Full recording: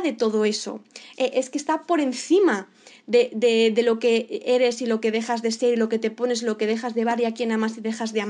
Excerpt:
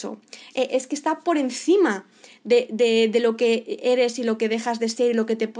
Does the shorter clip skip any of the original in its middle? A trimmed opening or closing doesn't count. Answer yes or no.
no